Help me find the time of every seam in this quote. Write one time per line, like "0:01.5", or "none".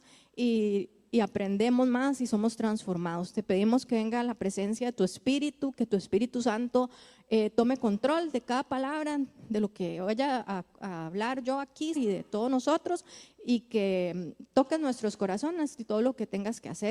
0:11.9